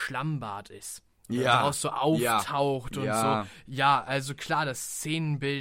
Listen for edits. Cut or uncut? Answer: uncut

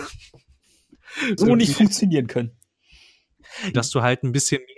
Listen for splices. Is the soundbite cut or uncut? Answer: cut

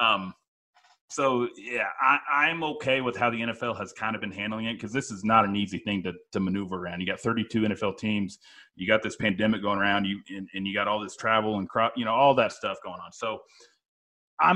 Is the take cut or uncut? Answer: uncut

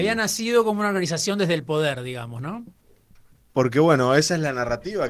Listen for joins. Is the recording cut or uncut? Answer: uncut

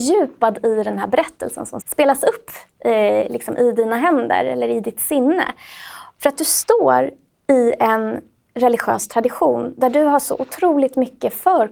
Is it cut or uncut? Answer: cut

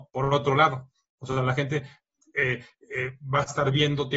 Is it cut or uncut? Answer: uncut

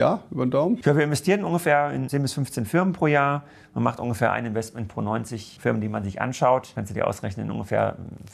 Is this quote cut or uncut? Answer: uncut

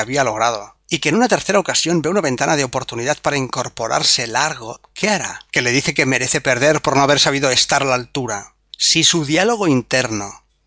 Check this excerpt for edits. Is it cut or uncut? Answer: cut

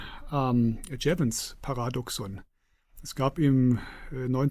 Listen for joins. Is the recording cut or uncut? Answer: uncut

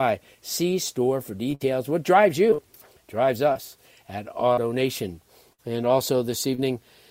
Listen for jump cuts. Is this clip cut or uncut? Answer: uncut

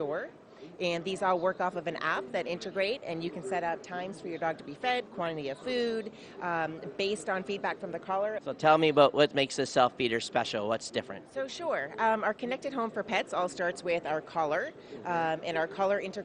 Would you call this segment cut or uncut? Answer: cut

